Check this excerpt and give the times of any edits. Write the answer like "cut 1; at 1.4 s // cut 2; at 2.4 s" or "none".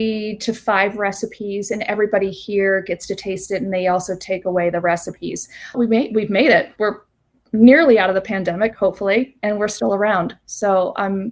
cut 1; at 5.7 s